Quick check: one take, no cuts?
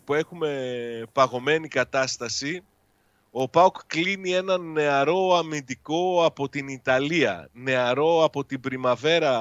yes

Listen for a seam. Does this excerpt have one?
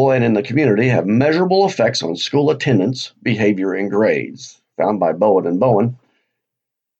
no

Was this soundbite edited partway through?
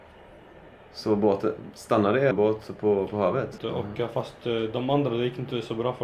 yes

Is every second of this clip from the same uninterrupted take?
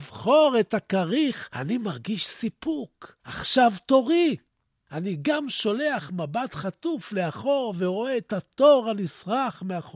yes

